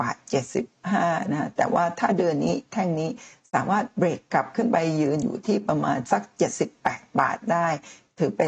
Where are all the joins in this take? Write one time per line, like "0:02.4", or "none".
none